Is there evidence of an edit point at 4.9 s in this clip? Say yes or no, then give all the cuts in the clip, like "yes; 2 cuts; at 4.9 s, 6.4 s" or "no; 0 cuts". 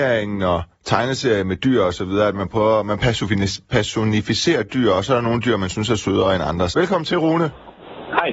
no; 1 cut; at 6.7 s